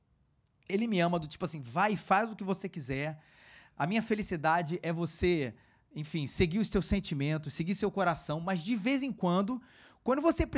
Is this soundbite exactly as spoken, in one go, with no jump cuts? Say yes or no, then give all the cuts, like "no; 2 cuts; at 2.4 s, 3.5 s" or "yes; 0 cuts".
yes; 0 cuts